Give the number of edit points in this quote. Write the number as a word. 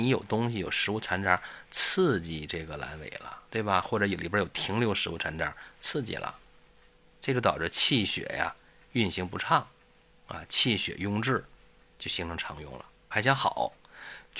one